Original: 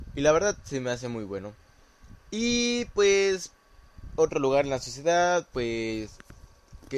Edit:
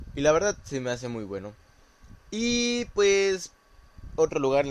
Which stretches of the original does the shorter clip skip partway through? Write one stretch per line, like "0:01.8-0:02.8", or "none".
none